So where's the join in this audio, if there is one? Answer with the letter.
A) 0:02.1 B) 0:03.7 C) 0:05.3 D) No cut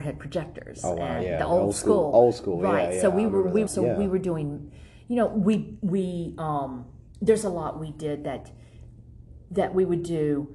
B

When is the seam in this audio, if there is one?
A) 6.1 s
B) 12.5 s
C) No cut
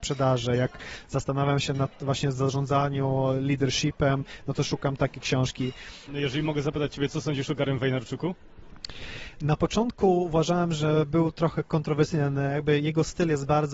A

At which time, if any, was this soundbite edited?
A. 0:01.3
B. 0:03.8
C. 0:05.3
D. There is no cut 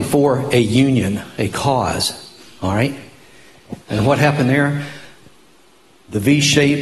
B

